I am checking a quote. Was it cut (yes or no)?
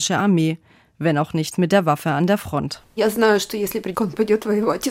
yes